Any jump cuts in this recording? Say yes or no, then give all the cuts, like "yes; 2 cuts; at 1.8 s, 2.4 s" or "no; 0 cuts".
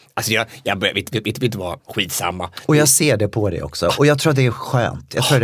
yes; 1 cut; at 1.8 s